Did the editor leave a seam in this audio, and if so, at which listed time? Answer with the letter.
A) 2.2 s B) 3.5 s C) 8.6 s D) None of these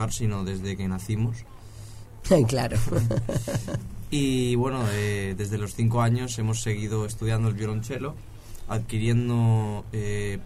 A